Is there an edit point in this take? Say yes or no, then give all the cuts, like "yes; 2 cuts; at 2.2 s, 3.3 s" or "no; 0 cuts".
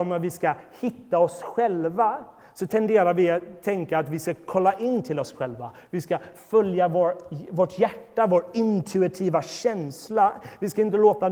no; 0 cuts